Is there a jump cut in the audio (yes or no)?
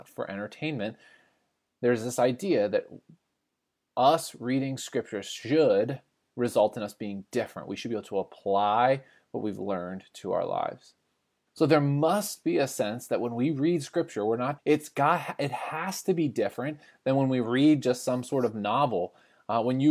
yes